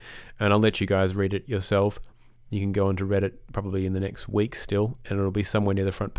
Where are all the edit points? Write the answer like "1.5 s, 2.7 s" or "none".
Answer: none